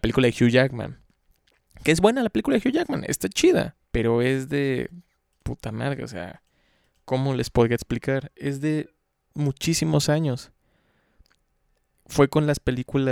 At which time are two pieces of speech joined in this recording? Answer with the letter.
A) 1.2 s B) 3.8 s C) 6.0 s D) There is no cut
B